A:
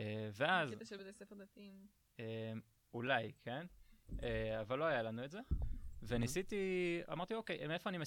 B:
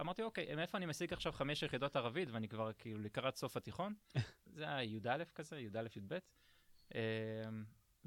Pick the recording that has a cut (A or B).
B